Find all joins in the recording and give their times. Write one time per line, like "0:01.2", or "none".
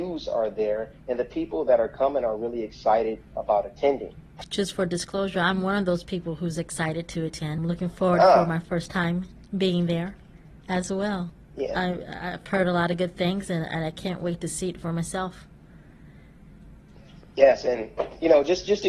none